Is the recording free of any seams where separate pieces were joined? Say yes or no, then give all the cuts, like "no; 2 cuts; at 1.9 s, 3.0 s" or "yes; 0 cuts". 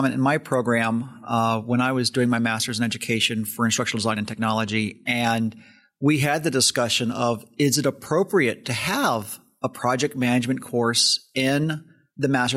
yes; 0 cuts